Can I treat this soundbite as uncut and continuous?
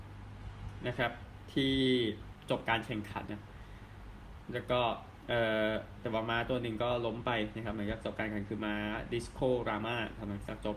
no; 1 cut; at 3.3 s

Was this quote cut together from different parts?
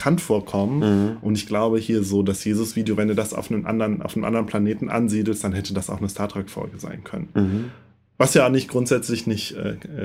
no; 0 cuts

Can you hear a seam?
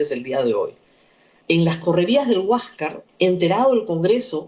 yes; 2 cuts; at 1.4 s, 3.1 s

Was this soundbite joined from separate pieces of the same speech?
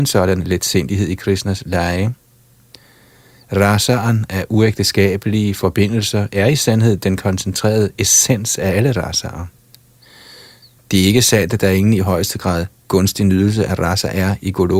yes; 1 cut; at 10.8 s

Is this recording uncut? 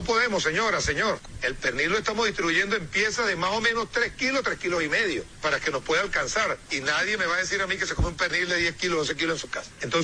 yes; 0 cuts

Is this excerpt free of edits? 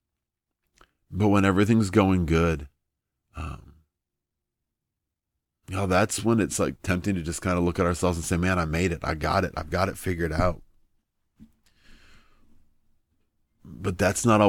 yes; 0 cuts

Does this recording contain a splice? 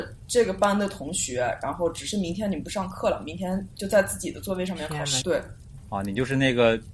yes; 1 cut; at 5.2 s

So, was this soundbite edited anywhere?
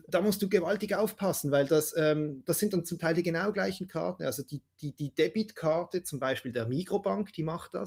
no; 0 cuts

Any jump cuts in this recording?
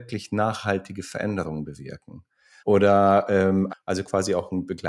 yes; 2 cuts; at 2.6 s, 3.7 s

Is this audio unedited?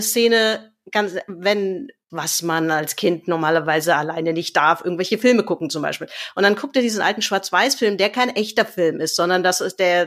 no; 1 cut; at 2.1 s

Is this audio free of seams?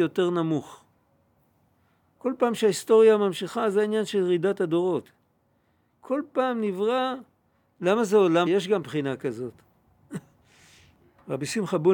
no; 1 cut; at 8.5 s

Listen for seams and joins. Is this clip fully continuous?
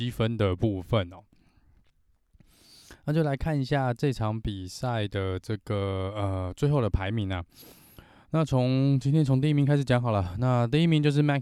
yes; 0 cuts

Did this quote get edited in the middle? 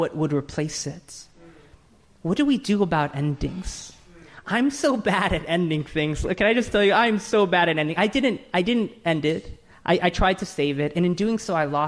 no; 0 cuts

